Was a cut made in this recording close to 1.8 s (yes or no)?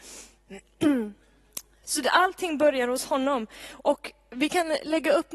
yes